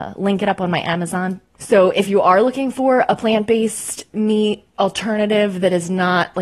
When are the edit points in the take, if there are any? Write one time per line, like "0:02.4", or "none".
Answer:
0:01.6